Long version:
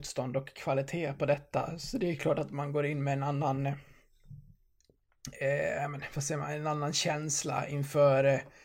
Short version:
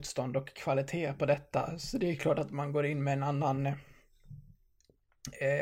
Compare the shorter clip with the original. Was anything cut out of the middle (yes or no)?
no